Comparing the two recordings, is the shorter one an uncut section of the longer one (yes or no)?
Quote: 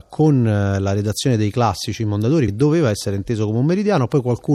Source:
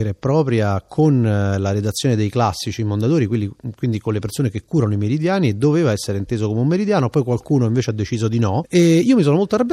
no